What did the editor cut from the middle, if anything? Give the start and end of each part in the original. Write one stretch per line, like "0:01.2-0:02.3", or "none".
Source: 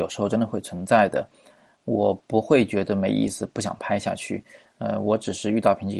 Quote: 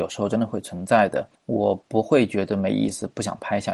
0:01.4-0:01.7